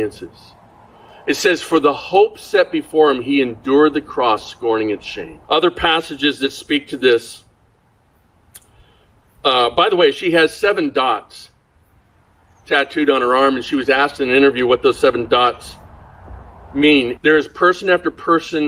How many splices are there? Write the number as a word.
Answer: two